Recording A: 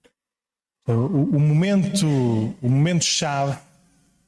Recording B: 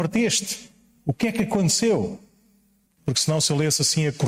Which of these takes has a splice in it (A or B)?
B